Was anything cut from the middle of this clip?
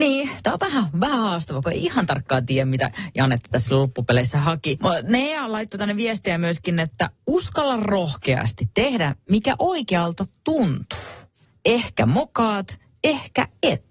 no; 0 cuts

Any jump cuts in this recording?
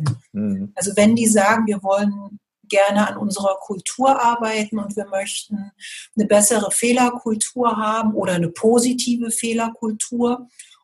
yes; 1 cut; at 1.6 s

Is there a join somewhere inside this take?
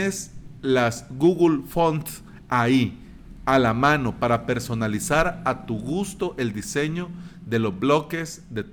no; 0 cuts

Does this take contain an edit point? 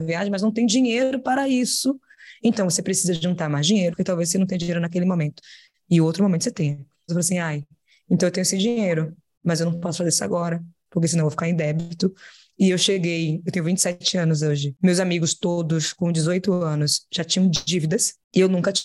yes; 2 cuts; at 3.9 s, 7.1 s

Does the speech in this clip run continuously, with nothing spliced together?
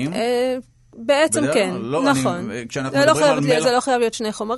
yes; 0 cuts

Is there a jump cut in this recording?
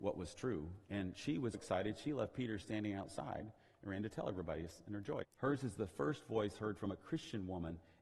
yes; 2 cuts; at 1.5 s, 5.2 s

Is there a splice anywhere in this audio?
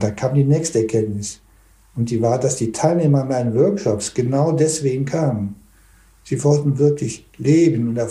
no; 0 cuts

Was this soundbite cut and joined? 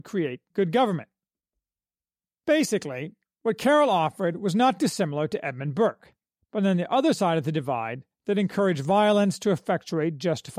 no; 0 cuts

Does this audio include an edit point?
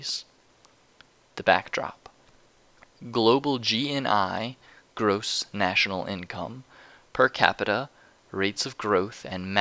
no; 0 cuts

